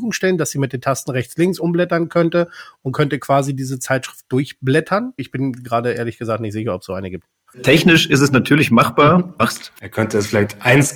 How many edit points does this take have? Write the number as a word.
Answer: two